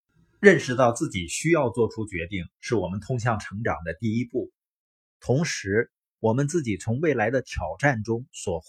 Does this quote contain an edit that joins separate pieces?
yes; 1 cut; at 5.0 s

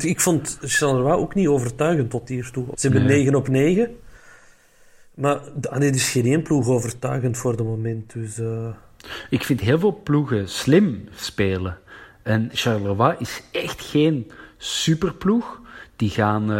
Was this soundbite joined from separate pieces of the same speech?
yes; 2 cuts; at 2.7 s, 12.5 s

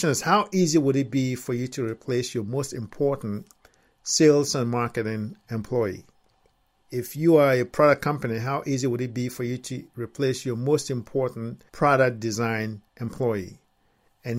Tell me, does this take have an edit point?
yes; 2 cuts; at 11.7 s, 12.9 s

